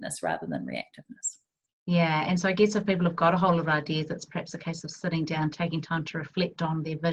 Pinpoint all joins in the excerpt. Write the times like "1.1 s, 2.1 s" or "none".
none